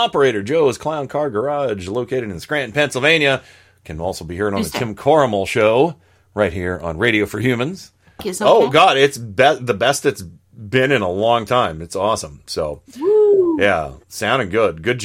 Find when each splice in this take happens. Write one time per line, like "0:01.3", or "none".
0:08.2

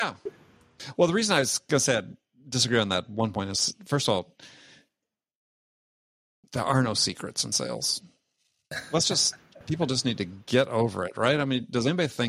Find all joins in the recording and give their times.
none

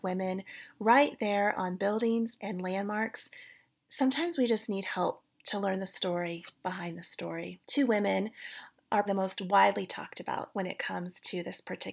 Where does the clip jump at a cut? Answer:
0:07.6
0:09.1

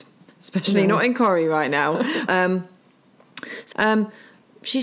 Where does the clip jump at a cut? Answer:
0:02.3
0:03.7

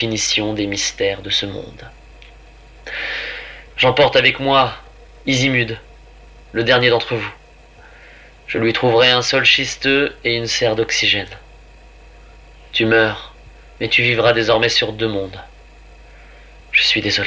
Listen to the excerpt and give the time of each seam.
0:03.7

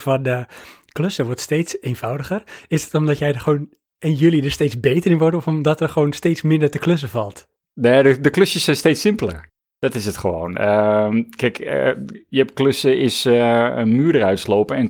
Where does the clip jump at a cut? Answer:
none

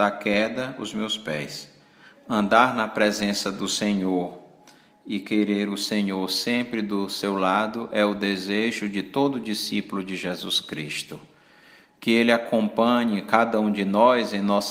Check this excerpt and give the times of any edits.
0:02.1

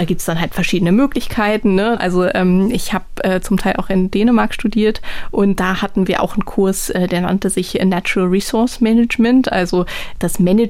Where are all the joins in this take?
0:02.0

